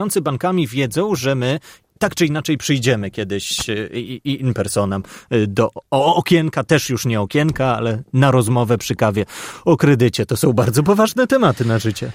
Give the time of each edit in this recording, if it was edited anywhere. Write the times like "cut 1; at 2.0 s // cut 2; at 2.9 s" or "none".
none